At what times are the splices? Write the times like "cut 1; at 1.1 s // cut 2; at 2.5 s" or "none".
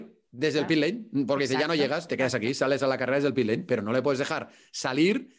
cut 1; at 2.1 s

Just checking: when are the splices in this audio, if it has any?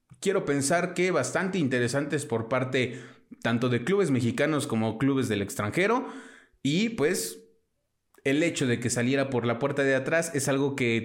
none

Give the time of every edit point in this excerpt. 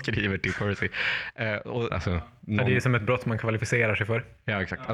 cut 1; at 1.9 s

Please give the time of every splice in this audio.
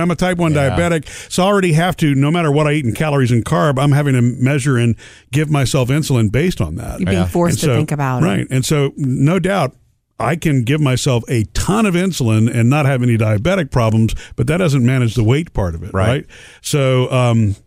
none

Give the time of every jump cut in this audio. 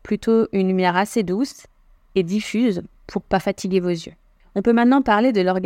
cut 1; at 2.9 s // cut 2; at 4.4 s

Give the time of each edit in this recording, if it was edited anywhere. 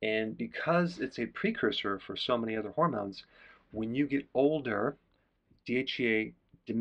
none

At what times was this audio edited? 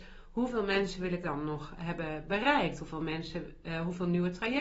none

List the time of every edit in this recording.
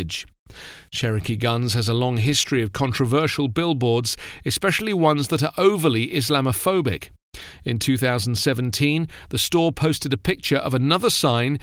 none

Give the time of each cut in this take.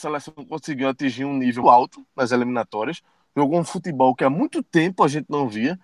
cut 1; at 1.6 s

